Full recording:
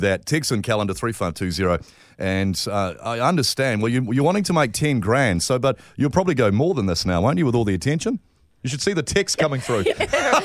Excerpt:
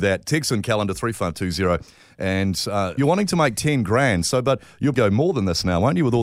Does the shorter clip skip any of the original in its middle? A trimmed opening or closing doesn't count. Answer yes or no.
yes